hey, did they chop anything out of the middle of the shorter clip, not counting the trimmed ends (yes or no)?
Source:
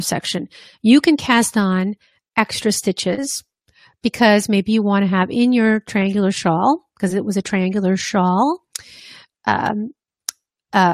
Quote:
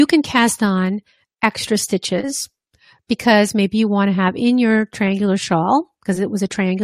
no